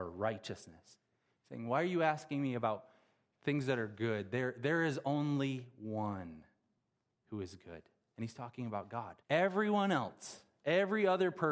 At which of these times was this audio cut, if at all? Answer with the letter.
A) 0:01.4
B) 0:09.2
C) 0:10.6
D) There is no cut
B